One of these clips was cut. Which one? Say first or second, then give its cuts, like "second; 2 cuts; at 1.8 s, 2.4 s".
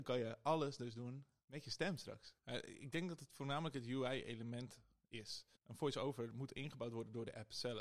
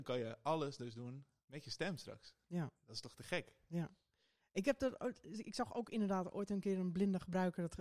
first; 2 cuts; at 2.4 s, 5.6 s